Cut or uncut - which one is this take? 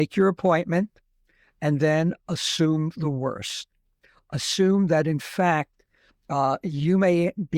uncut